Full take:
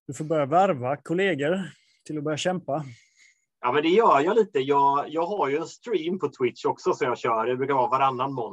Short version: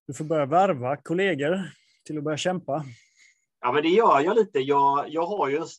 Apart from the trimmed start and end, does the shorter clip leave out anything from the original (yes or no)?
no